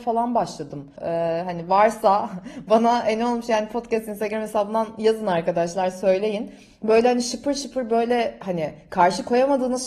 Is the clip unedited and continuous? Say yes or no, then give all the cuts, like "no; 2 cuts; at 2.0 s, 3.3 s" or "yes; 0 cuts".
no; 1 cut; at 1.0 s